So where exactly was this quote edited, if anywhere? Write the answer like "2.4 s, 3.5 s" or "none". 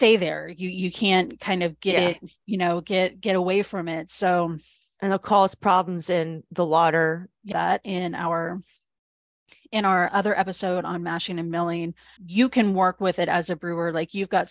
7.5 s, 10.1 s, 12.2 s